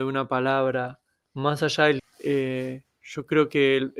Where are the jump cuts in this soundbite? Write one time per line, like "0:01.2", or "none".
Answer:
0:02.0